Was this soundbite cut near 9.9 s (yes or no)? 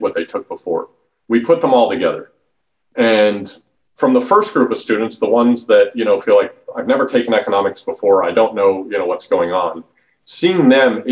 no